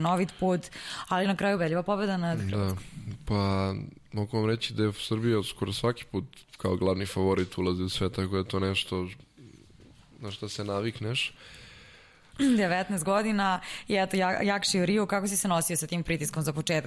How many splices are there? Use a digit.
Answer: 1